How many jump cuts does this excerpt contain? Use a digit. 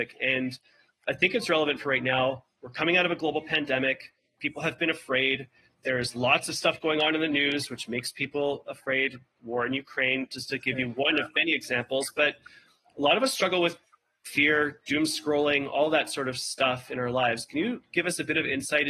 0